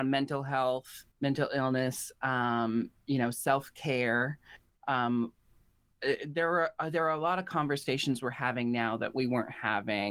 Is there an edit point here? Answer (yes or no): yes